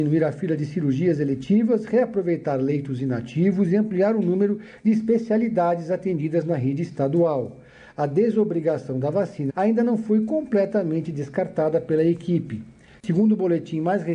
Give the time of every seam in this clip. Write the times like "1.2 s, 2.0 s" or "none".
9.5 s, 12.9 s